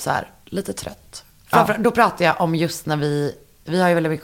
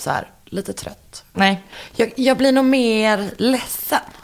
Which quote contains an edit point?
second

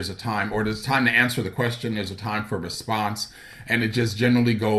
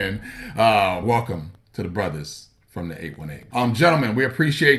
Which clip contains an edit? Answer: second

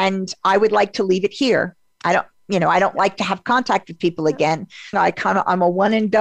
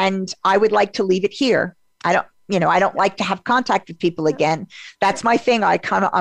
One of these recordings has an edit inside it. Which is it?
first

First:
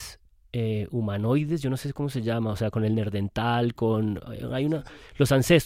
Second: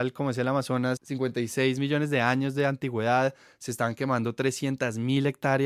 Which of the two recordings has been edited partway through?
second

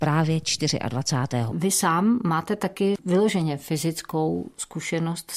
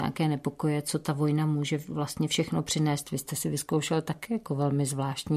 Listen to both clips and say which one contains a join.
first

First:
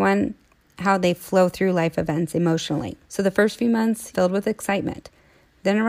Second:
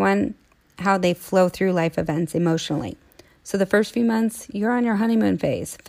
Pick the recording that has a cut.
first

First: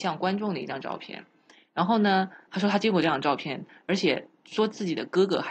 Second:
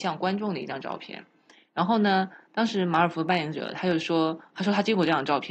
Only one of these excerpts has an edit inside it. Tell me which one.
first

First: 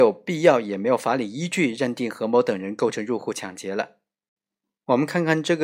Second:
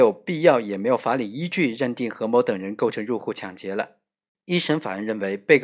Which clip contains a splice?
second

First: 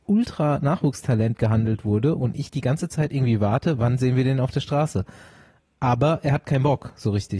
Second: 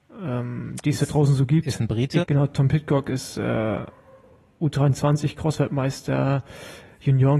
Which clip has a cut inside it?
second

